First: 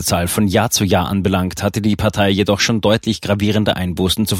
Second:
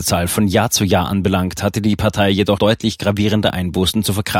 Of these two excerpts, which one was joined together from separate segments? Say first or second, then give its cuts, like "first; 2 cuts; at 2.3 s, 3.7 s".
second; 1 cut; at 2.6 s